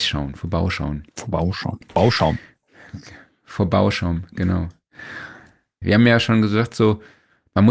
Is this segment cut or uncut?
cut